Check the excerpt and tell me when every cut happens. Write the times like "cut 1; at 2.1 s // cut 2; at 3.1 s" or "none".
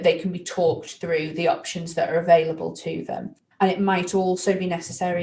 cut 1; at 3.5 s